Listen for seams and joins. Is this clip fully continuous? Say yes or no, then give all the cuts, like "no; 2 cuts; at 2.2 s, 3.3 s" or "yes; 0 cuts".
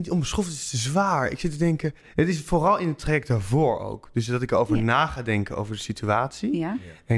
yes; 0 cuts